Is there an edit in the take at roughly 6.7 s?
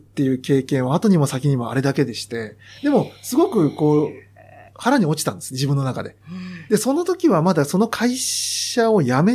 no; 0 cuts

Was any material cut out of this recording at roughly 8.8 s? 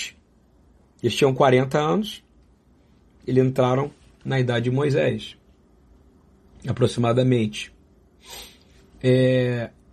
no; 1 cut; at 3.2 s

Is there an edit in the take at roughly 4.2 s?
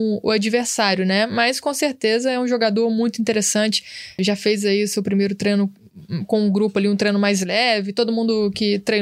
yes; 1 cut; at 4.2 s

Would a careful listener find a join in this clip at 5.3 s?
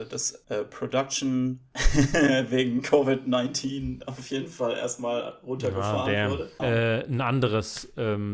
no; 1 cut; at 6.6 s

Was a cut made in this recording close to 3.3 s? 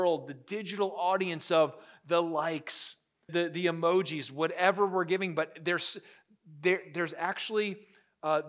yes; 1 cut; at 3.3 s

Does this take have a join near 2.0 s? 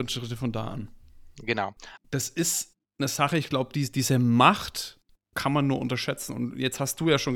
yes; 1 cut; at 2.0 s

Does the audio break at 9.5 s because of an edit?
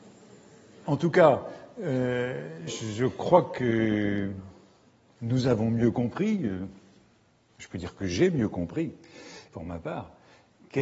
yes; 1 cut; at 9.5 s

